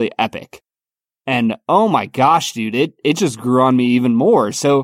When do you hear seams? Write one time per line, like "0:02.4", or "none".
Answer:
none